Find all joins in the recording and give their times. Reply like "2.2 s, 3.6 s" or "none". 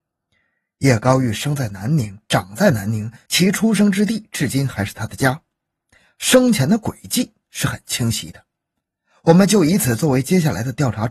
none

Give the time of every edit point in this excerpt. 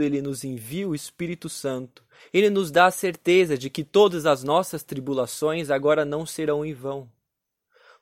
2.2 s

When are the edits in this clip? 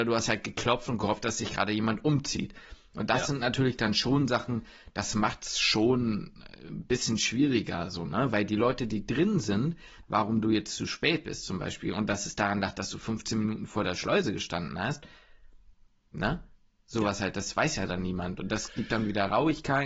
10.0 s

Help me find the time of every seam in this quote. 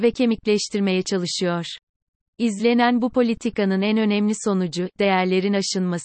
2.3 s, 4.9 s

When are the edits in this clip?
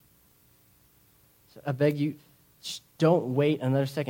1.6 s

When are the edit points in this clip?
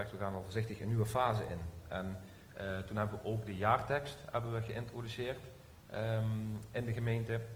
none

